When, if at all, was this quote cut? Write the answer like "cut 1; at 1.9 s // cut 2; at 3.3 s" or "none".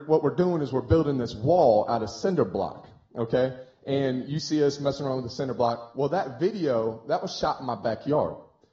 none